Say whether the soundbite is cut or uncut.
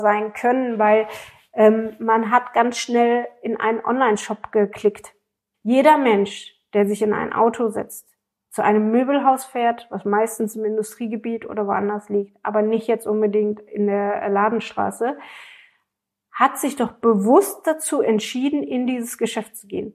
cut